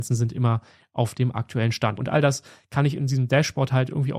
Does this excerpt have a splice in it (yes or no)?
yes